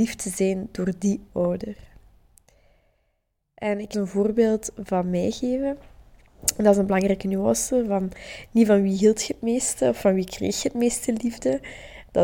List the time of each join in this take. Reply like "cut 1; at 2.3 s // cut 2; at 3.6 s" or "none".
cut 1; at 3.9 s

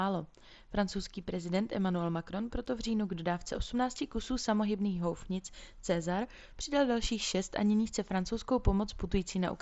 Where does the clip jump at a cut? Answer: none

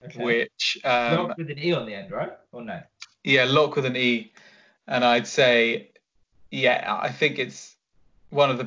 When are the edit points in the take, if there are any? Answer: none

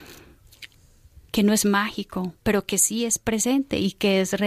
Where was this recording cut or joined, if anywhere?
cut 1; at 1.3 s // cut 2; at 2.4 s

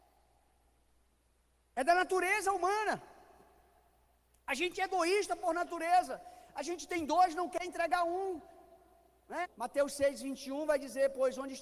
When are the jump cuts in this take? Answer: cut 1; at 9.4 s

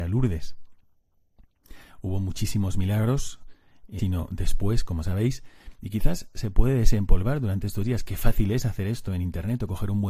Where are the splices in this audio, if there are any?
cut 1; at 4.0 s

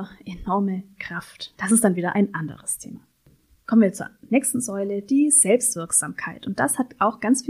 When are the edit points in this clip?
cut 1; at 1.5 s

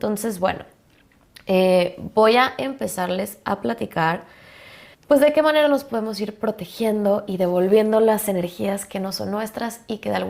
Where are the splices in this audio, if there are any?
cut 1; at 4.9 s

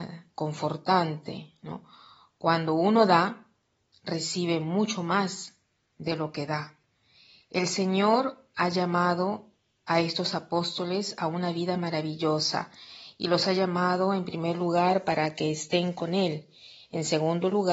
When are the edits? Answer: none

